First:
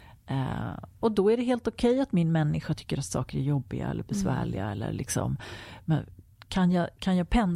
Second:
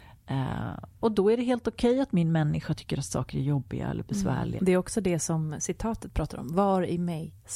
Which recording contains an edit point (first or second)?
second